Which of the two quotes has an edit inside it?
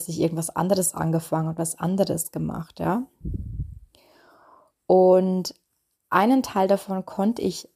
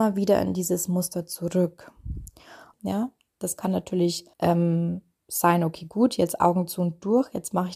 second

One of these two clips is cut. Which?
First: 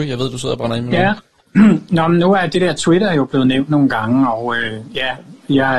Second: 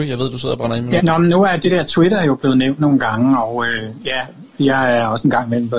second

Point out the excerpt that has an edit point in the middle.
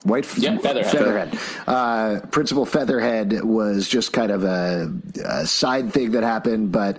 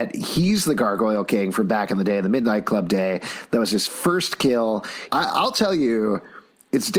second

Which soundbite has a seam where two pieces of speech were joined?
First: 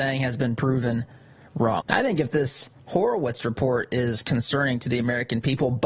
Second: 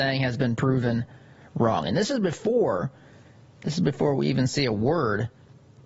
first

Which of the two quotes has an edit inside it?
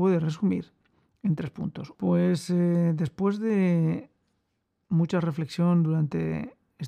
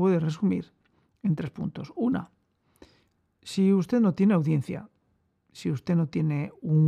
first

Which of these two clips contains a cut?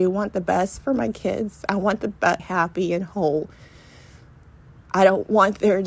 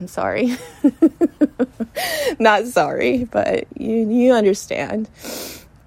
first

